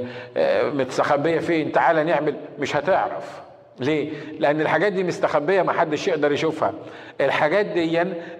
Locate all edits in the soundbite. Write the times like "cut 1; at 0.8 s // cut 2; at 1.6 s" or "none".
none